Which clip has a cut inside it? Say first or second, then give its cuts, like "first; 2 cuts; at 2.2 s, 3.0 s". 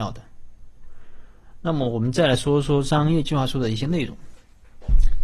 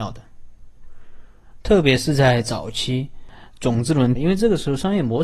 second; 2 cuts; at 1.6 s, 4.1 s